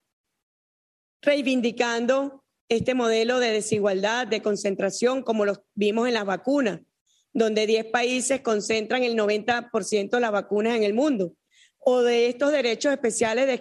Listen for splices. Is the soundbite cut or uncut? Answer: uncut